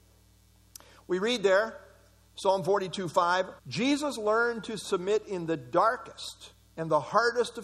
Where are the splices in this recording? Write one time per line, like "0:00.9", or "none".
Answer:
0:03.6